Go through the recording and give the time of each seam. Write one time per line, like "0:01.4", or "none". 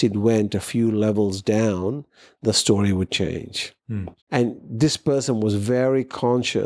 0:04.2